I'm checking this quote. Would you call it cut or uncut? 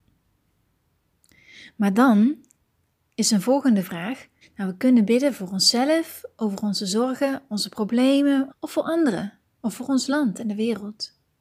cut